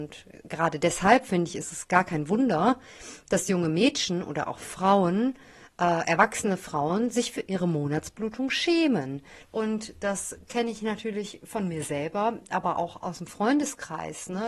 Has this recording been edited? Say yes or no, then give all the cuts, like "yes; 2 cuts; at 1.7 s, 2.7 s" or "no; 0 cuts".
yes; 1 cut; at 9.4 s